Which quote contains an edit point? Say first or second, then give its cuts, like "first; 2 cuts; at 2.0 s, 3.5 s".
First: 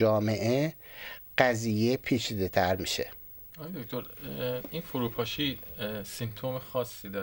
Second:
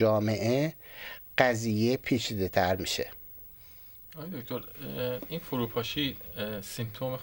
first; 1 cut; at 3.5 s